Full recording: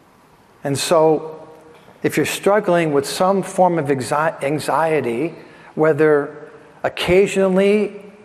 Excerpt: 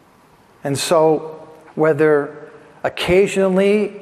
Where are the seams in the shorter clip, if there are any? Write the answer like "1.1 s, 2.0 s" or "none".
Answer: 1.7 s